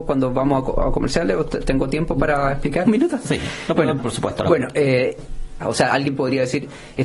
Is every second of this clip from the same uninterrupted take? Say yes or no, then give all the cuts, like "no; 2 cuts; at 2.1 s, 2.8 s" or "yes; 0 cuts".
no; 3 cuts; at 2.8 s, 4.0 s, 5.6 s